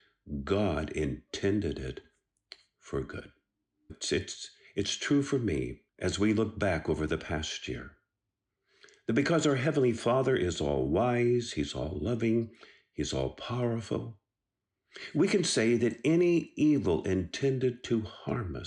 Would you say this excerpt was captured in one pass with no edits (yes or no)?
no